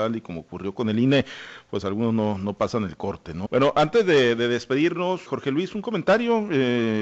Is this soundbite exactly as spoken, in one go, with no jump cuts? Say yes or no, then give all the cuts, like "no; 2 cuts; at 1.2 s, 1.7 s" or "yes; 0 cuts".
no; 2 cuts; at 3.5 s, 5.3 s